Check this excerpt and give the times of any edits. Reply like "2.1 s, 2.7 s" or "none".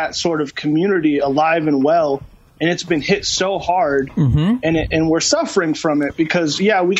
none